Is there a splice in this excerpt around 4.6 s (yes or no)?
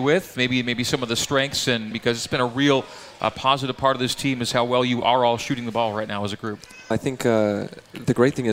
no